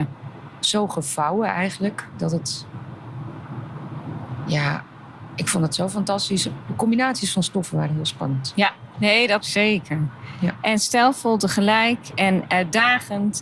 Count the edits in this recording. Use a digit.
2